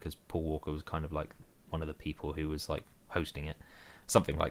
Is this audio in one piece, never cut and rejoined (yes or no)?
yes